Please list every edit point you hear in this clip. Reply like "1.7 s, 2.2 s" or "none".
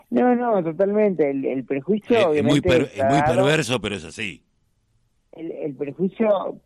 none